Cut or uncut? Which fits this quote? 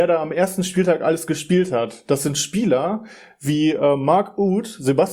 uncut